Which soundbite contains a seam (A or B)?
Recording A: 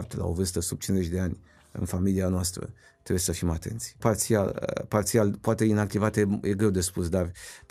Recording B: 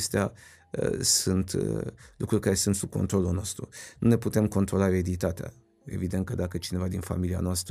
A